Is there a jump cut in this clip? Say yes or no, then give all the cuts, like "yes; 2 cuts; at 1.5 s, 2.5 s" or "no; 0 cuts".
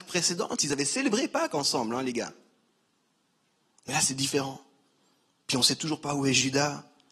no; 0 cuts